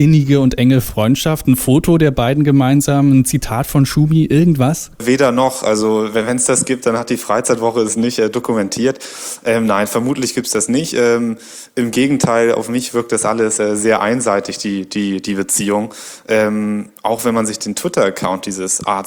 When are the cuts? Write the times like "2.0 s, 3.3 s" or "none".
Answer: none